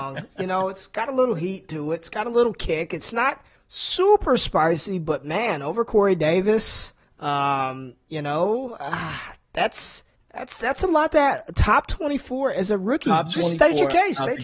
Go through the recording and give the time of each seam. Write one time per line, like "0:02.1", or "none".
none